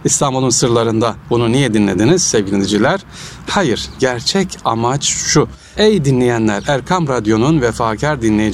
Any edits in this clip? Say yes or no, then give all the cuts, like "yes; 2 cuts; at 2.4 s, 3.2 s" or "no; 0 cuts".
yes; 2 cuts; at 3.5 s, 5.7 s